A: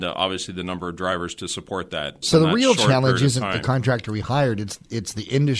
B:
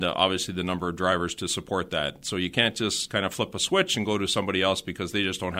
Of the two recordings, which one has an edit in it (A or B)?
A